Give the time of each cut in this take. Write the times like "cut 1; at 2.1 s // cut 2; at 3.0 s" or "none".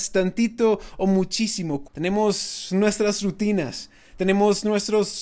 cut 1; at 1.8 s